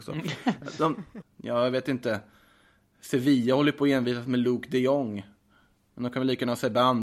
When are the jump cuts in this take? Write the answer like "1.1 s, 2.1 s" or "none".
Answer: 1.2 s